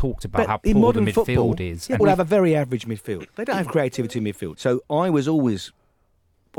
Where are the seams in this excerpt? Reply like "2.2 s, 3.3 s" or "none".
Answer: 2.0 s, 4.5 s